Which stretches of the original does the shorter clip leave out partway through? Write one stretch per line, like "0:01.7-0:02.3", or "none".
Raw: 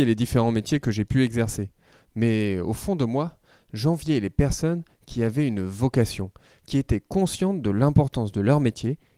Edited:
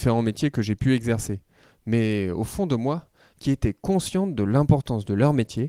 0:03.6-0:06.6